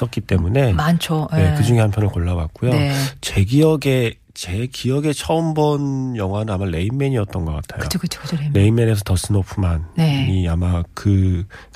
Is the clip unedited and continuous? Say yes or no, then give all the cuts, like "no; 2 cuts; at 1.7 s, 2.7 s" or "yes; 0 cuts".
yes; 0 cuts